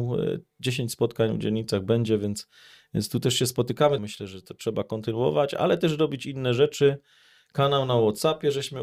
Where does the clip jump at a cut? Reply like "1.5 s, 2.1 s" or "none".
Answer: 4.0 s